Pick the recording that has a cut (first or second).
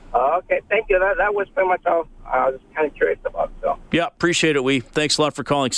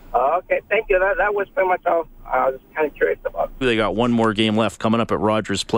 second